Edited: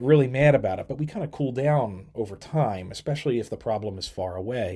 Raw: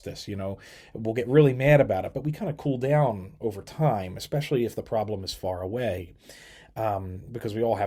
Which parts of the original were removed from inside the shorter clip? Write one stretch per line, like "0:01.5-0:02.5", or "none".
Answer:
none